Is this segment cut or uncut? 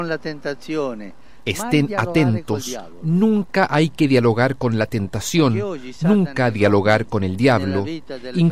uncut